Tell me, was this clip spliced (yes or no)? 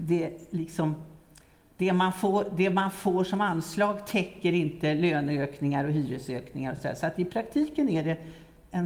no